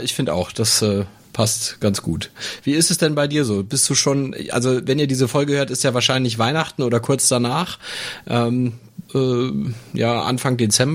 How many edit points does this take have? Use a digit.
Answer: 1